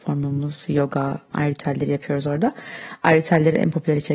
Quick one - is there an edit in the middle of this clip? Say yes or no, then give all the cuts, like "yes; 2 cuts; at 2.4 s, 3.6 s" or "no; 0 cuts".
yes; 1 cut; at 1.3 s